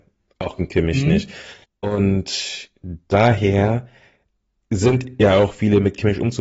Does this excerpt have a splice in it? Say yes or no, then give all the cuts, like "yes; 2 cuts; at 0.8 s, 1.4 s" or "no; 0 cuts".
yes; 1 cut; at 1.6 s